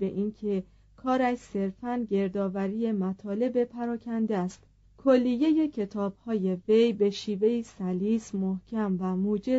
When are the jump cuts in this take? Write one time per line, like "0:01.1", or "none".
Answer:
0:04.8